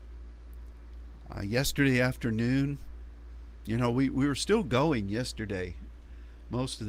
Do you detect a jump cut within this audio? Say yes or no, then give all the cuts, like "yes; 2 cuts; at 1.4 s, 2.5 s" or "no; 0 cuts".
no; 0 cuts